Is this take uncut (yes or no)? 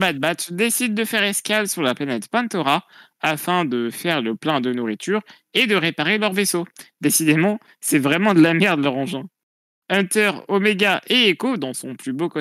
yes